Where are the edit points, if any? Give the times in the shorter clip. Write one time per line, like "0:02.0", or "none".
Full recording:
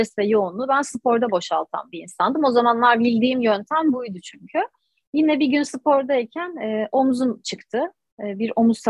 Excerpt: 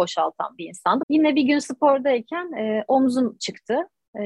0:01.0